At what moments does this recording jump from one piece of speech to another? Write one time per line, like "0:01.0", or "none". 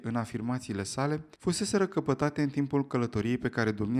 0:01.3